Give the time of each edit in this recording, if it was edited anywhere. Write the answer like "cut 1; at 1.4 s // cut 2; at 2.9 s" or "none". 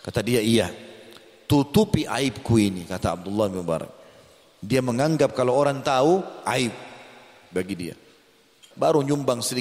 cut 1; at 8.7 s